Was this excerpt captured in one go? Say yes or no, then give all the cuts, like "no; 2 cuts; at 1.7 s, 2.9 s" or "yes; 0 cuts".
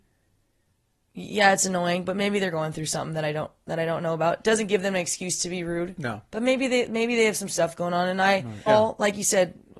no; 1 cut; at 8.7 s